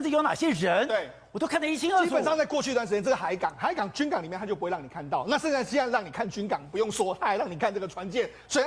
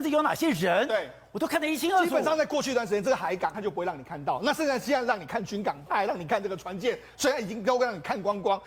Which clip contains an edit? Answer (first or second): second